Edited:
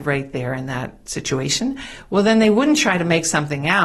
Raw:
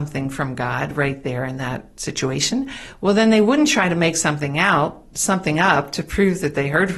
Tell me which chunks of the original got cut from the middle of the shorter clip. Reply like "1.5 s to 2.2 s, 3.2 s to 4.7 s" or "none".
none